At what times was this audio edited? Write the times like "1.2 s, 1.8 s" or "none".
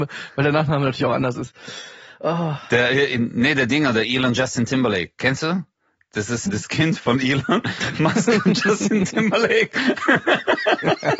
6.5 s